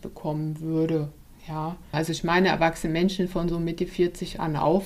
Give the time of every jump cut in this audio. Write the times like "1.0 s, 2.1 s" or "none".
1.9 s

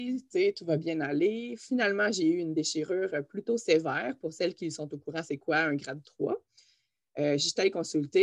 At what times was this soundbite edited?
none

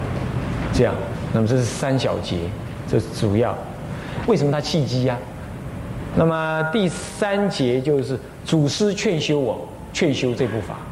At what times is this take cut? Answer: 4.2 s, 6.1 s

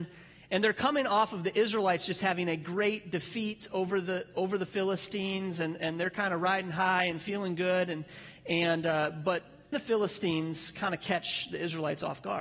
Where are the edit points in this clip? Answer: 9.7 s

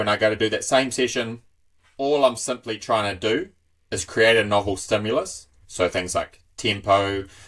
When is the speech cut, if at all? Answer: 5.7 s

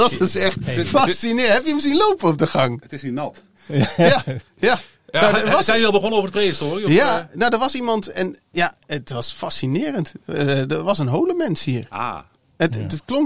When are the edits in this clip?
4.5 s

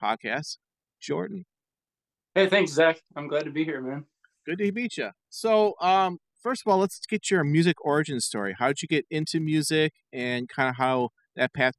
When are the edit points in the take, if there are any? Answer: none

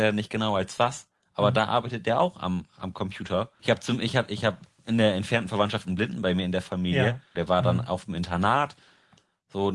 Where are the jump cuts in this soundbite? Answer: 3.6 s, 7.4 s

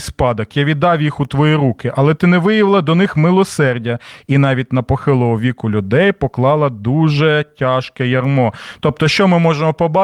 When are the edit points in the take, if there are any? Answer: none

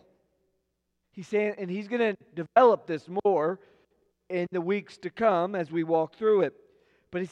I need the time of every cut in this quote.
1.0 s

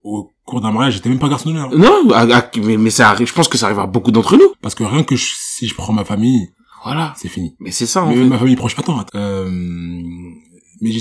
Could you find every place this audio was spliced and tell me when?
4.5 s, 9.1 s

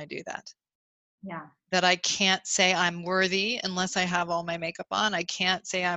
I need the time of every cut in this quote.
none

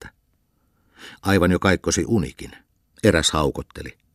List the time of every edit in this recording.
2.9 s

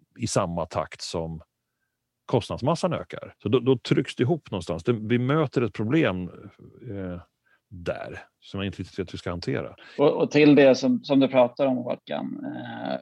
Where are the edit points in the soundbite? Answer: 3.4 s

